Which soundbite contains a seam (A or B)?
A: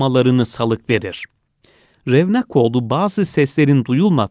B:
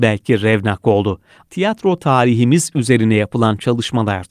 B